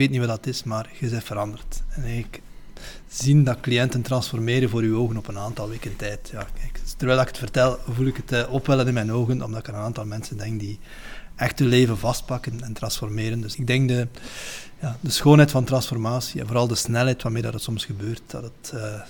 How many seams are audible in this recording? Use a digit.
1